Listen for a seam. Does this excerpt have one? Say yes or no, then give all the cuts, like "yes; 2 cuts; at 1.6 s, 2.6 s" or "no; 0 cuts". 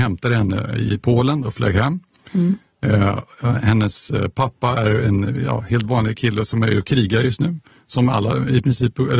no; 0 cuts